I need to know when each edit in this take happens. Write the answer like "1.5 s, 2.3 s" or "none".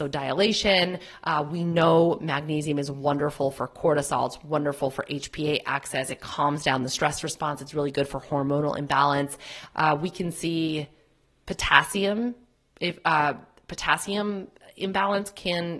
9.7 s